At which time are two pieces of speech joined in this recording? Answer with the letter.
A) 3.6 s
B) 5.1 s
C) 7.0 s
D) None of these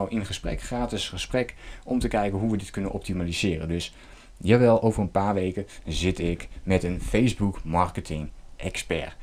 D